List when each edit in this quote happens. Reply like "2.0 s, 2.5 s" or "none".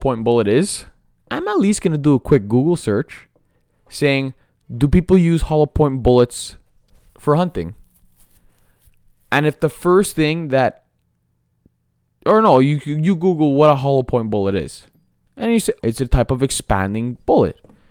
1.2 s, 15.8 s

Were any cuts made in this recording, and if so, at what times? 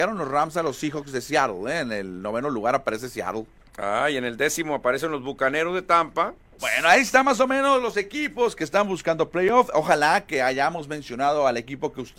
6.6 s

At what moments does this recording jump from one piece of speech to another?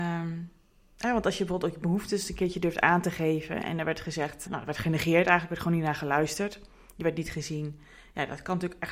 4.5 s

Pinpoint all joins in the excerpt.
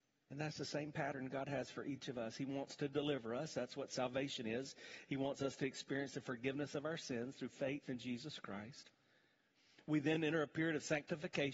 none

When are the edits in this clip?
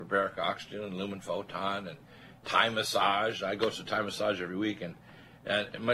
none

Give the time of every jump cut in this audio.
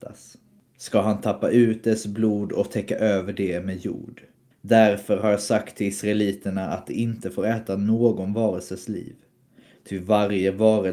4.5 s

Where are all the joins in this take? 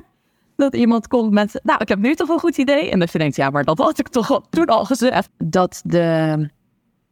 5.3 s

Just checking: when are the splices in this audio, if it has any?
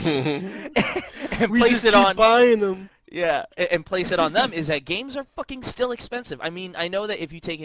none

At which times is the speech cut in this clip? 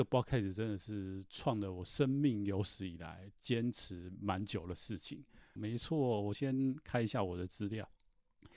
5.6 s

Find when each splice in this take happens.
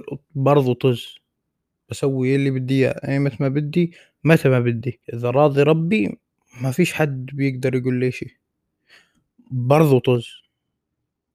5.0 s

